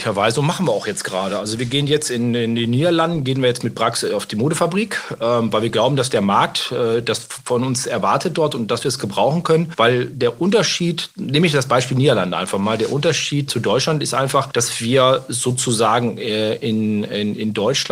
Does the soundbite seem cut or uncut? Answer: cut